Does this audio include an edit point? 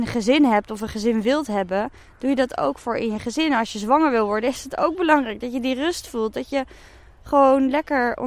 no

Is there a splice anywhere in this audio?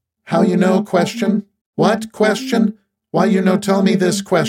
yes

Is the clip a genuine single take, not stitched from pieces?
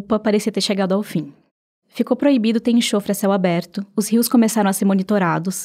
yes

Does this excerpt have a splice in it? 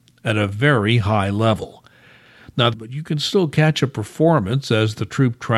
yes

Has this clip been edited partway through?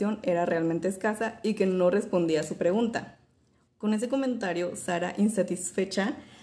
yes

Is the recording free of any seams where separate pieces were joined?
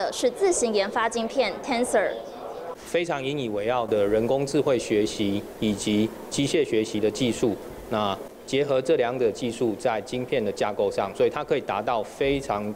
yes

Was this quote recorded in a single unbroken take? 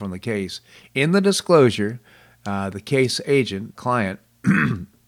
no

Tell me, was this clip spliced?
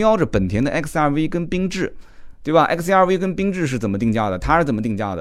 no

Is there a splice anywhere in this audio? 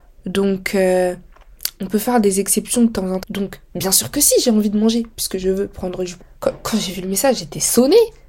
yes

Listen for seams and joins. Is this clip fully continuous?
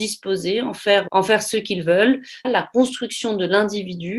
no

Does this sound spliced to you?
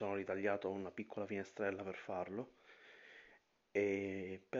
no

